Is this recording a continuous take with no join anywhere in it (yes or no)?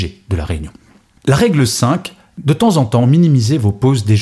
yes